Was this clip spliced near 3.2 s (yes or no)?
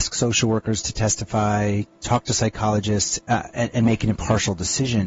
yes